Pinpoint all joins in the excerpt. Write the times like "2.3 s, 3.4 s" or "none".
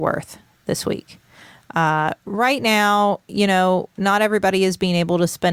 none